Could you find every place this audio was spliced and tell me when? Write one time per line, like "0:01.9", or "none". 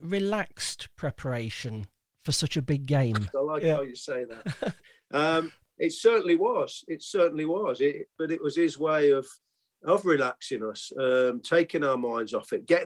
0:03.3